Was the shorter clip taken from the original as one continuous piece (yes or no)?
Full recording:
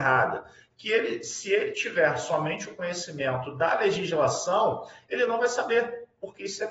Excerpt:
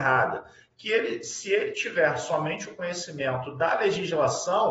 yes